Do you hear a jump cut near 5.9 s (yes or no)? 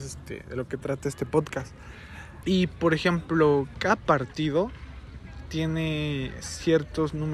no